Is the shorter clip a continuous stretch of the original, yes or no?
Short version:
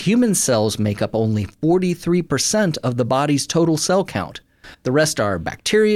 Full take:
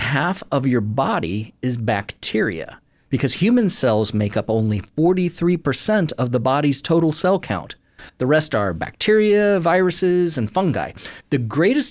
yes